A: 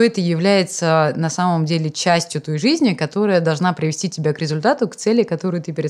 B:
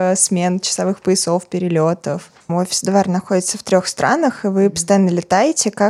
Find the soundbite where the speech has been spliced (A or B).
B